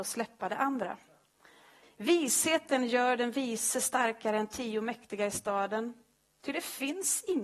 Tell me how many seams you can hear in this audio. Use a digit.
1